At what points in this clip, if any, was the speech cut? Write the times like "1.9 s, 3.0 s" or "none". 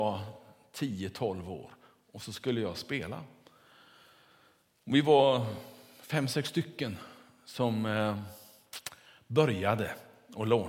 none